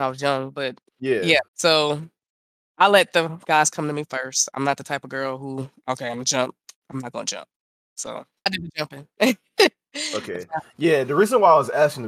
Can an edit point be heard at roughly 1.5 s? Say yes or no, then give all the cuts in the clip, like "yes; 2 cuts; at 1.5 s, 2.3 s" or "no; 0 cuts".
yes; 2 cuts; at 1.5 s, 8.5 s